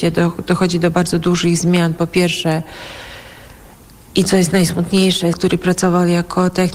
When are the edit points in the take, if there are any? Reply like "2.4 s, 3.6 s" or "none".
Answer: 5.3 s